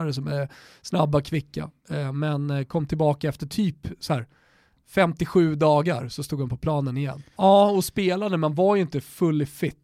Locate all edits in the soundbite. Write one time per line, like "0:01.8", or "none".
0:07.3

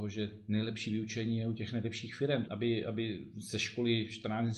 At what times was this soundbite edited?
0:02.4

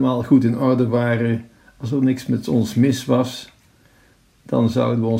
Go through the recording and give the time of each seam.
none

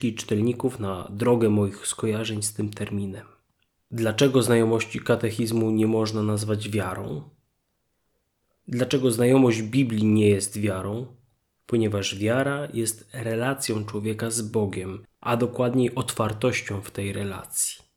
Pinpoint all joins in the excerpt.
0:11.5
0:15.1

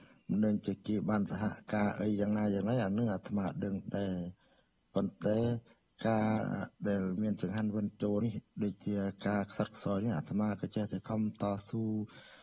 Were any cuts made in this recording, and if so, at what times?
0:08.2

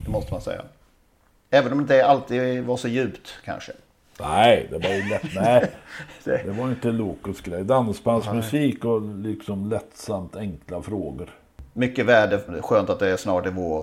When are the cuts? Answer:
0:12.5

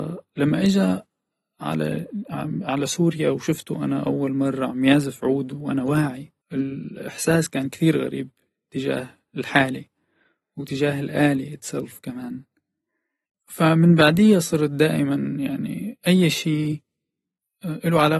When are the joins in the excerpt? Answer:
0:06.4

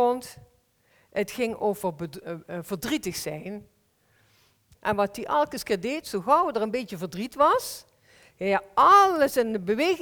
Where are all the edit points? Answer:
0:04.7

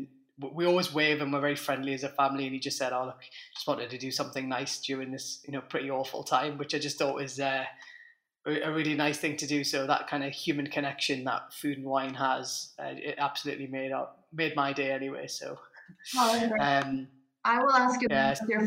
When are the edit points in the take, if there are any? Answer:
none

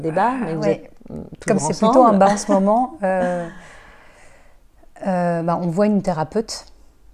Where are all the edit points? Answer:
none

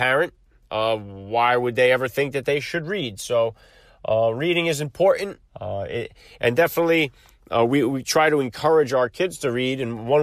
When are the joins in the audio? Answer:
0:05.4

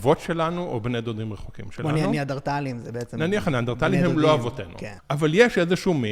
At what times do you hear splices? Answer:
0:05.0

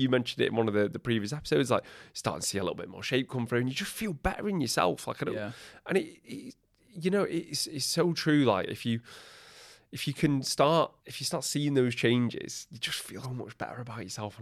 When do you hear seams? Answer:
0:11.0
0:13.2

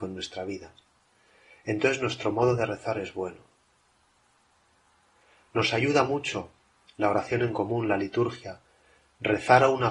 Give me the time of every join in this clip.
none

